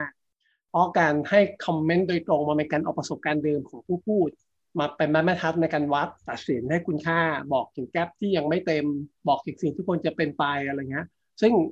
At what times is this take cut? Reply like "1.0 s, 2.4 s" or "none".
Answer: 6.2 s, 9.2 s